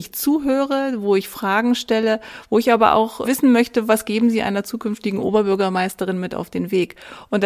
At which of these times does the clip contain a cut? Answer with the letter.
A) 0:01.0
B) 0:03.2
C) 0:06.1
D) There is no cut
B